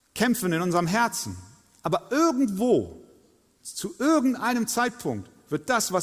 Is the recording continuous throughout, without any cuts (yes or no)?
yes